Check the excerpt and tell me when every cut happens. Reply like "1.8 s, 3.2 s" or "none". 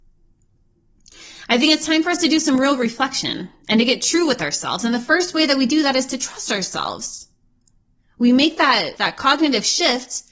9.0 s